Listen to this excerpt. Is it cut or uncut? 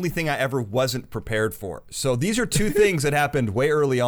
uncut